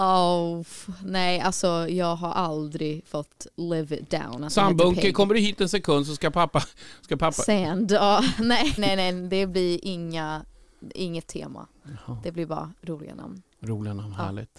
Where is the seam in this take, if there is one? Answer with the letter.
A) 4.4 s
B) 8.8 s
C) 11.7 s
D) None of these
B